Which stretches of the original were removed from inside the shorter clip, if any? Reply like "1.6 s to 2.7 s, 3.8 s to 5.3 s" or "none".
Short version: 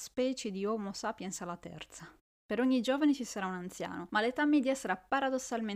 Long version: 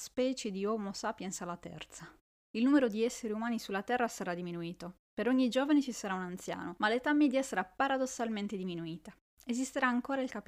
2.4 s to 5.0 s